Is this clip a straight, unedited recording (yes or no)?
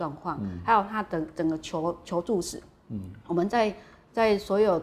yes